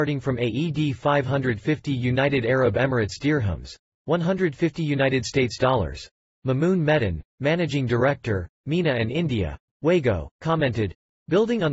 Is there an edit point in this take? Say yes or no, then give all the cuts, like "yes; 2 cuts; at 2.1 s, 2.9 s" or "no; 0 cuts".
no; 0 cuts